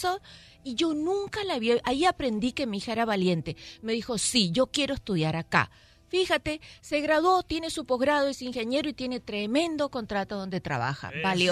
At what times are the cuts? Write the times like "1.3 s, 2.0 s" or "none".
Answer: none